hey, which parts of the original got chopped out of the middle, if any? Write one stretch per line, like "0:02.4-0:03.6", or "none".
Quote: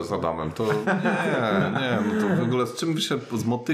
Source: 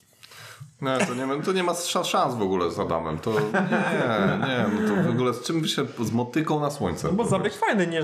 none